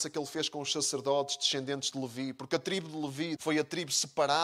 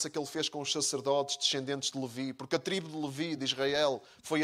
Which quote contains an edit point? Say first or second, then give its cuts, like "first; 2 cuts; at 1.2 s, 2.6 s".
first; 1 cut; at 3.4 s